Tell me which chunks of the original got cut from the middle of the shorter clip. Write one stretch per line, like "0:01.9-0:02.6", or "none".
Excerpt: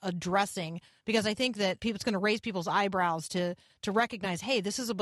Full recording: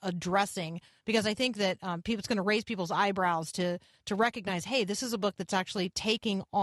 0:01.8-0:02.0

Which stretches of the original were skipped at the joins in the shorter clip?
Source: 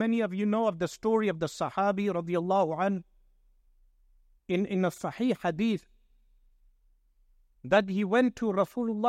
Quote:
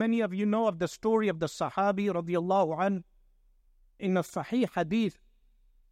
0:04.0-0:04.7

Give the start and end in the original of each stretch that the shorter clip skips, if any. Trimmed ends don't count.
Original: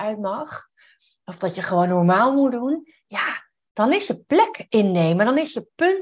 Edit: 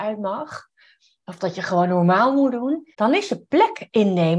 0:02.9-0:03.7

